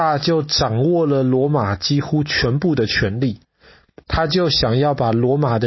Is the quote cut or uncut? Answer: uncut